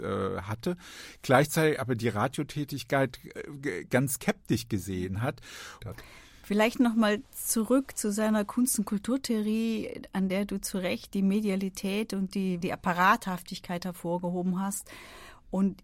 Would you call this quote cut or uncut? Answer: cut